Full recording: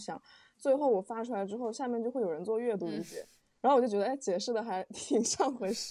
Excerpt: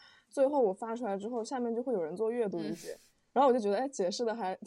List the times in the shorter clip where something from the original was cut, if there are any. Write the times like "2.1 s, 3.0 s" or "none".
none